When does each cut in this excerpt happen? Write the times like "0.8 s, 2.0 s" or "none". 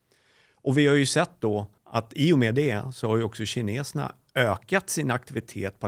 1.8 s